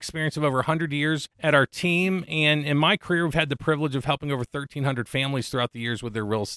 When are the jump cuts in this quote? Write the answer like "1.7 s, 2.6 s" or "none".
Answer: 1.3 s